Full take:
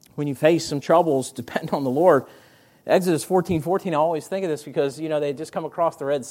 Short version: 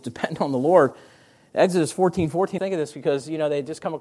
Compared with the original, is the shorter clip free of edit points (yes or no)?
no